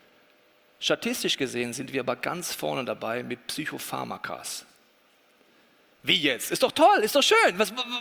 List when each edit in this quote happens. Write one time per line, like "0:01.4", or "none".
none